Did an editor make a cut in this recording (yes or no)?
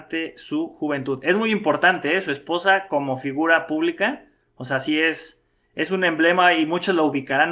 no